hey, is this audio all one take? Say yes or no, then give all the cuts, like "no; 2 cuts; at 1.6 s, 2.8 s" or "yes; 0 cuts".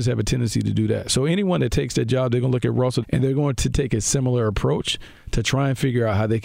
no; 1 cut; at 3.0 s